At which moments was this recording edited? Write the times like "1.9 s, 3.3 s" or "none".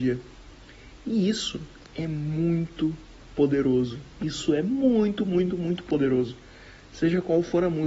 none